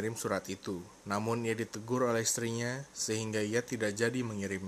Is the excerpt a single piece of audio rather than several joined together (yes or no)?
no